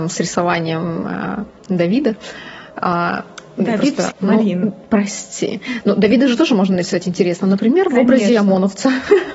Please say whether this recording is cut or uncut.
cut